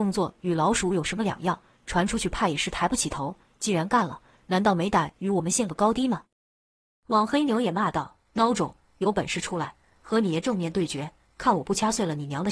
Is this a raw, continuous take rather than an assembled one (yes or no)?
yes